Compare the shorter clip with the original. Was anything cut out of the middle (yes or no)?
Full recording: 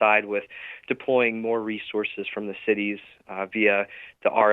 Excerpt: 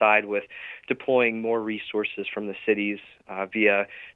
no